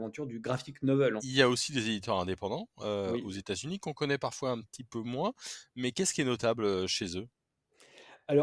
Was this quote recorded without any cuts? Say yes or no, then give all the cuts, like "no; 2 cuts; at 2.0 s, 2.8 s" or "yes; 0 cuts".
no; 1 cut; at 1.2 s